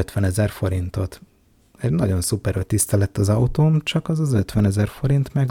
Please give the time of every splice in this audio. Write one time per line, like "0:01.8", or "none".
none

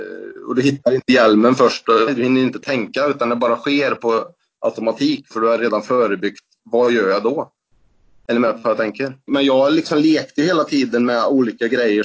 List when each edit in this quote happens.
0:02.1
0:09.3

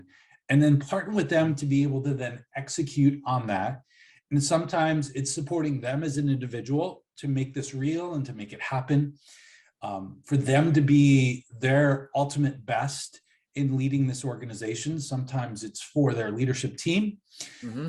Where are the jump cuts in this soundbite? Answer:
none

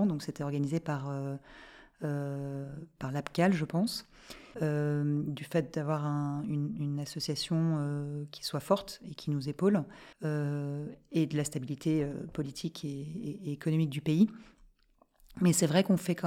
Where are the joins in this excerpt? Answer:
0:04.5
0:10.1

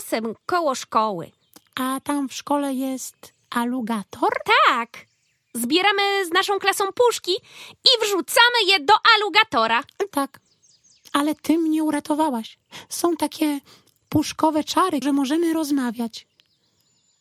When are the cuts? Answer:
0:10.1
0:15.0

